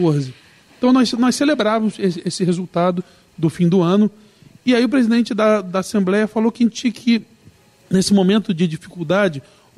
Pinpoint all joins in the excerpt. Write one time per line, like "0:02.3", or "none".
none